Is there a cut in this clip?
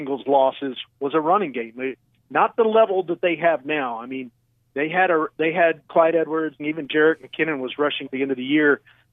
yes; 2 cuts; at 6.6 s, 8.1 s

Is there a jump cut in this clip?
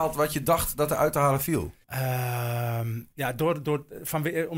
yes; 2 cuts; at 1.8 s, 3.1 s

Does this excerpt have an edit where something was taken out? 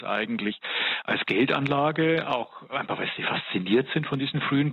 yes; 1 cut; at 1.0 s

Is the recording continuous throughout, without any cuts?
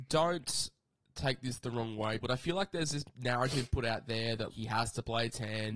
no; 2 cuts; at 2.2 s, 4.5 s

